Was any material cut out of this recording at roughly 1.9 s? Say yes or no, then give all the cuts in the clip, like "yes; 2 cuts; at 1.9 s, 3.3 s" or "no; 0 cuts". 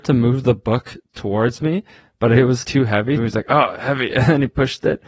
no; 1 cut; at 3.2 s